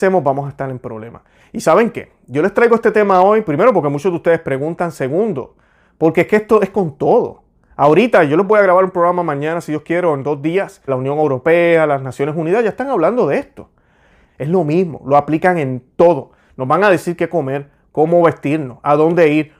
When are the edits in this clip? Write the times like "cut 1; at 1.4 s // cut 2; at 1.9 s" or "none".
cut 1; at 10.9 s // cut 2; at 14.3 s